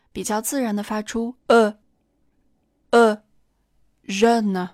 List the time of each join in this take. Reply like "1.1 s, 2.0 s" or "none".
1.4 s